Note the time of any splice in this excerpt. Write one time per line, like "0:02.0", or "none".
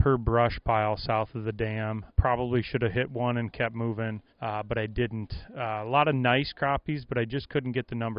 0:02.1
0:04.3